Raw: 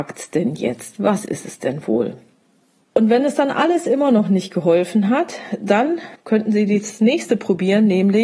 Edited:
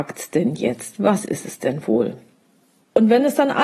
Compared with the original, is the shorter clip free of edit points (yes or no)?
yes